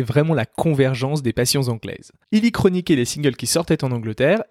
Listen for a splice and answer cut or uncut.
cut